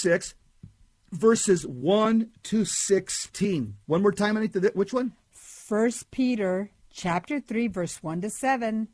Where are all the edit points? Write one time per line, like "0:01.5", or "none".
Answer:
0:03.8